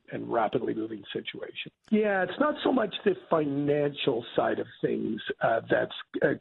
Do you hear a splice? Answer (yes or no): yes